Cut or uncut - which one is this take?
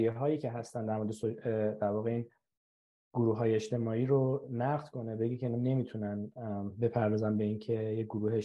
uncut